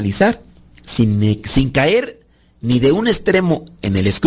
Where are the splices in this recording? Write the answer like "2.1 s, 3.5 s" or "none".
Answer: none